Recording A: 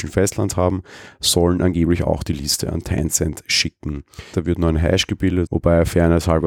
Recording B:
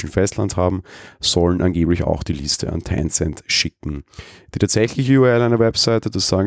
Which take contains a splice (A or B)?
A